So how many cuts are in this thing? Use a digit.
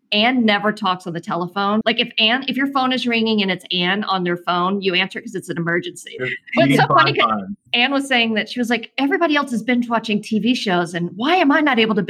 3